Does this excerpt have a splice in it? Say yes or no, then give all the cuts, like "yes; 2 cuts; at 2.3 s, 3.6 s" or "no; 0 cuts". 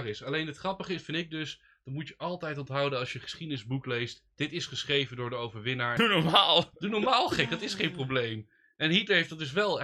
yes; 1 cut; at 6.0 s